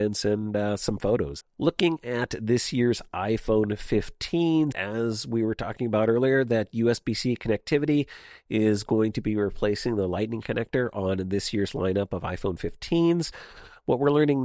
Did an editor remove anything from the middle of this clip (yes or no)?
yes